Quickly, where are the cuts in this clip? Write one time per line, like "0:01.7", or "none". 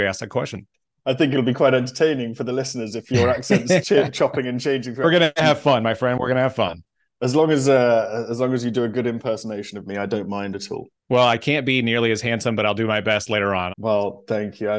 0:11.0
0:13.7